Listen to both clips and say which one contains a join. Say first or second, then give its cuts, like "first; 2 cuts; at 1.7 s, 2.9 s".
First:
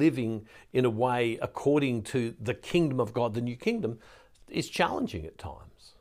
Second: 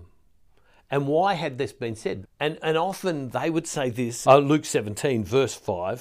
second; 2 cuts; at 2.2 s, 4.2 s